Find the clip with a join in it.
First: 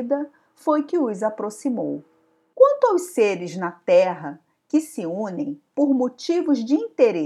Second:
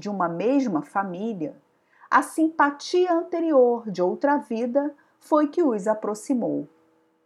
first; 1 cut; at 2.5 s

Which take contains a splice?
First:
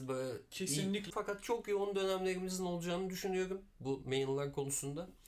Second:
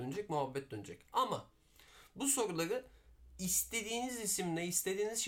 first; 1 cut; at 1.1 s

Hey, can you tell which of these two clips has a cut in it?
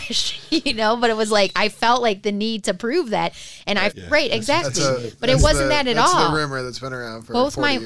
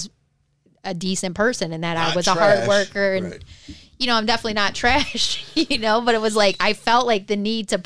first; 1 cut; at 3.9 s

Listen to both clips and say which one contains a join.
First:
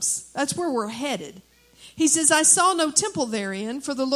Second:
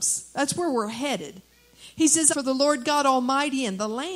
second; 1 cut; at 2.3 s

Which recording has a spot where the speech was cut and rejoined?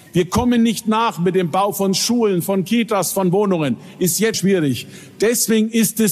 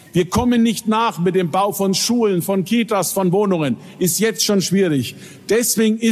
first; 1 cut; at 4.3 s

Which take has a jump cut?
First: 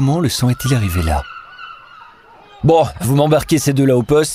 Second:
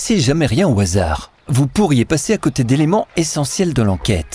first; 1 cut; at 3.0 s

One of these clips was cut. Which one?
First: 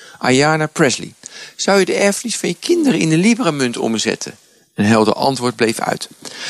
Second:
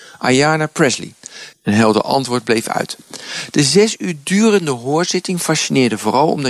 second; 1 cut; at 1.5 s

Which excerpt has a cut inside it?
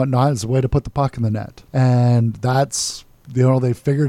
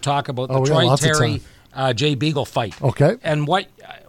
first; 1 cut; at 1.7 s

